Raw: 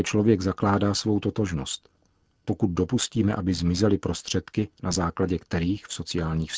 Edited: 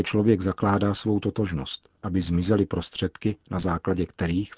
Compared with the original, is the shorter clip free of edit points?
no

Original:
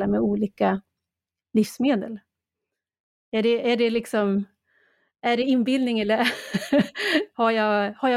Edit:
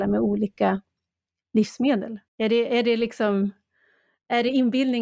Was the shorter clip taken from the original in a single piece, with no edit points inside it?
no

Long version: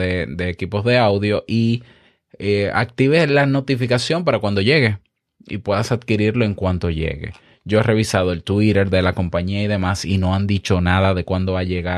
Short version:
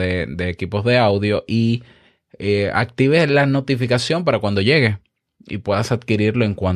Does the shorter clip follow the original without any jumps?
yes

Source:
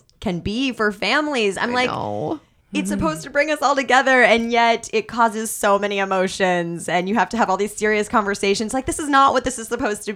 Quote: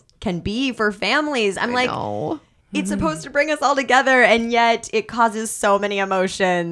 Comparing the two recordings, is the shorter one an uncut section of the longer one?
yes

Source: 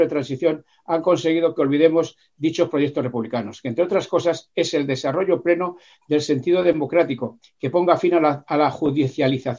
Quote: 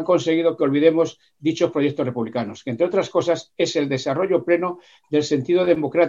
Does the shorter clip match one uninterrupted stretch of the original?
yes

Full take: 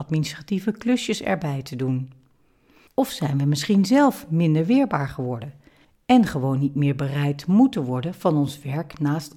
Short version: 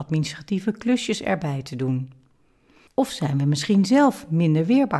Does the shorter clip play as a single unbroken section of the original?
yes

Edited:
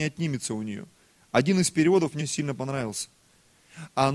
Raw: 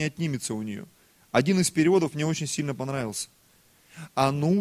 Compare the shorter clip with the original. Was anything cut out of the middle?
yes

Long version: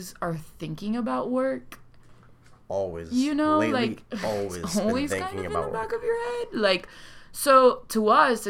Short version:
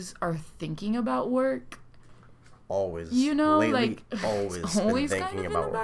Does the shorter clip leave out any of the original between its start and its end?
no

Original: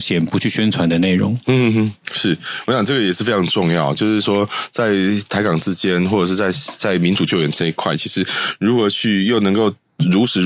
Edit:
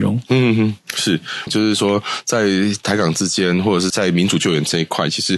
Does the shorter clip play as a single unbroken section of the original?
no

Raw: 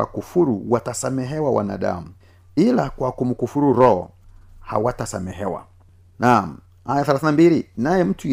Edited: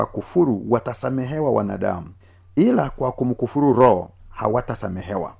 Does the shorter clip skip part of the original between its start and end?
yes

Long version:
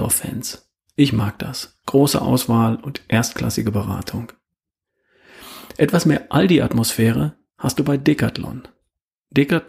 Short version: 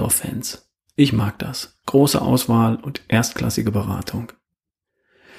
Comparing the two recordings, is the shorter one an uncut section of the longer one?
yes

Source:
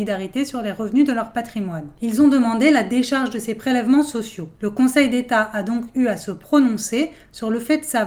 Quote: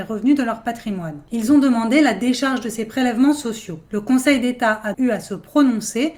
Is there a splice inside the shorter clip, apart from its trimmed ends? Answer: yes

